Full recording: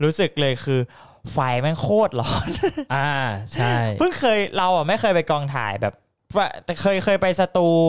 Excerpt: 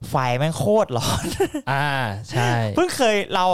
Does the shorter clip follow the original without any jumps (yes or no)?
yes